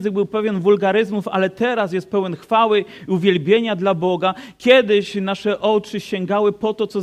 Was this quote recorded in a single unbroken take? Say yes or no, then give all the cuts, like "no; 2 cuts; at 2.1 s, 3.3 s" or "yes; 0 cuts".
yes; 0 cuts